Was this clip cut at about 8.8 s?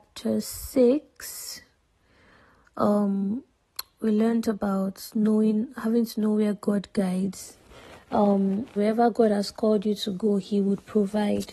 yes; 1 cut; at 8.8 s

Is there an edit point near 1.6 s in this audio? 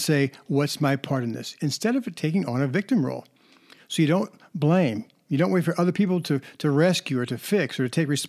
no; 0 cuts

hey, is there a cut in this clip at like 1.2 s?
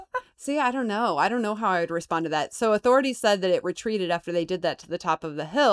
no; 0 cuts

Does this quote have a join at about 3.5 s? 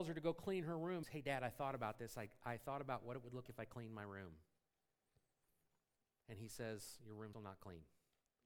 yes; 3 cuts; at 1.0 s, 3.5 s, 7.3 s

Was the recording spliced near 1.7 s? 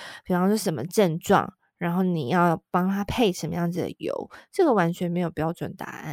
no; 0 cuts

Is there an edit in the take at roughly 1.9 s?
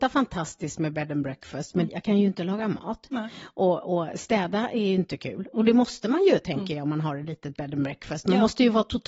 yes; 1 cut; at 1.9 s

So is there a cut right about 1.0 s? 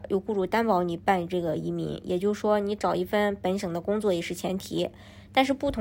yes; 1 cut; at 1.0 s

